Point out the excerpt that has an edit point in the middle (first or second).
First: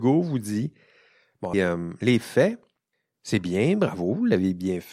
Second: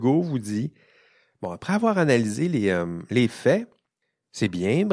first